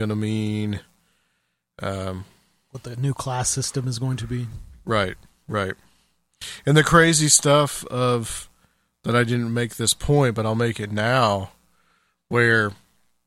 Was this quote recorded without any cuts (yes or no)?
yes